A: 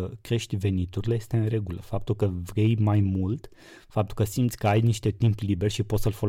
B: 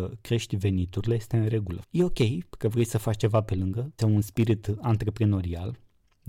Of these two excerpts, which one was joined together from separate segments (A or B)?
B